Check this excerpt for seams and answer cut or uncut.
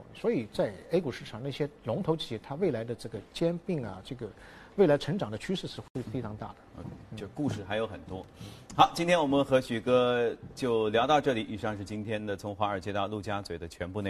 uncut